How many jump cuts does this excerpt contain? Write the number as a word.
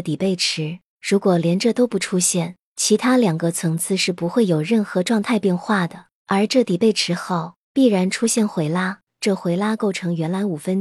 one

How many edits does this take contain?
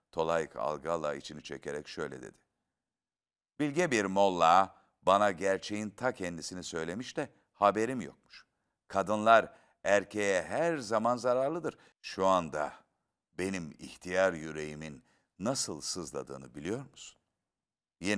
one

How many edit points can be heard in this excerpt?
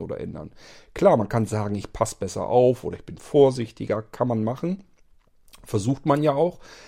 zero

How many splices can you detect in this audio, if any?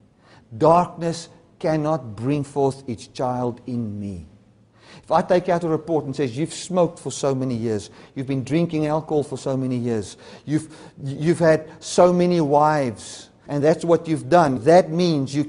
two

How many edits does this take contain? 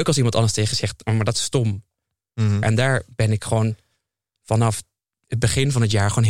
one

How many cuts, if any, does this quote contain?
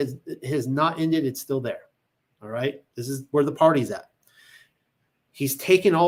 zero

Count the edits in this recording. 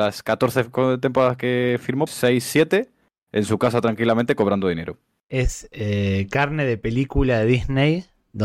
one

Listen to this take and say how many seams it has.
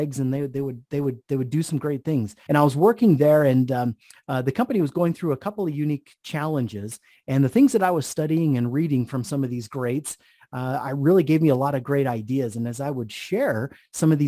one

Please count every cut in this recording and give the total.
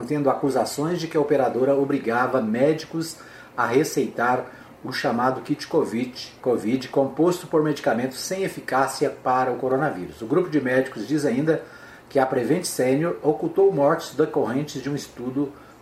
one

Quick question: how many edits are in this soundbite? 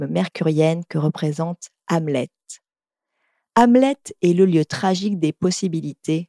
zero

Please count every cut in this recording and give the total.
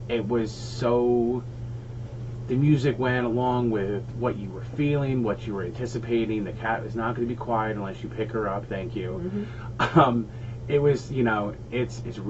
zero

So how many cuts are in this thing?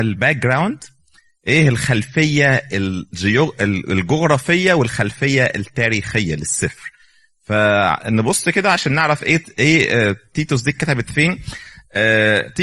zero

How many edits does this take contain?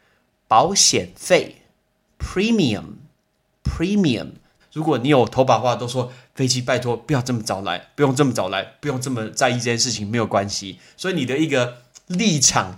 one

